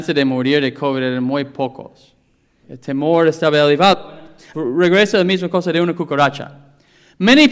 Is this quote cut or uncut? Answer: cut